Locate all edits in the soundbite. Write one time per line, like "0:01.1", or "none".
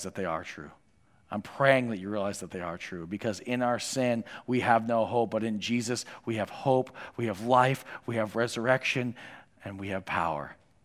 none